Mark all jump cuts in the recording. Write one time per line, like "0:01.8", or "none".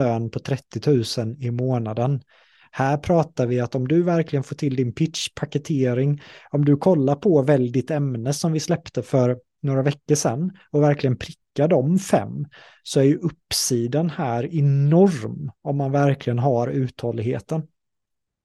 none